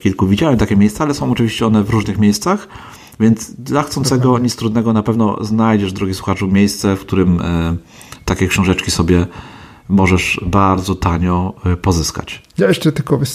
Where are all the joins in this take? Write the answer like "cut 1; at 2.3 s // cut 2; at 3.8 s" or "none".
none